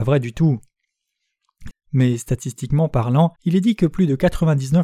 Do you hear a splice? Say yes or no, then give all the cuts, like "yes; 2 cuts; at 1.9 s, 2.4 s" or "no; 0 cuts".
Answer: yes; 2 cuts; at 1.7 s, 3.4 s